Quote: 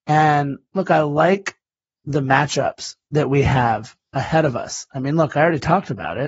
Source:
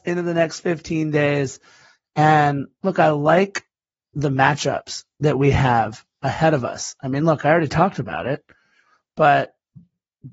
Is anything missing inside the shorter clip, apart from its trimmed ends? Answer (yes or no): no